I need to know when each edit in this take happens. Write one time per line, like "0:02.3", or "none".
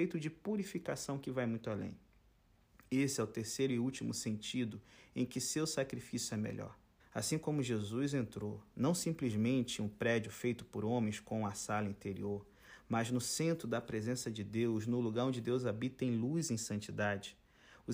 0:07.0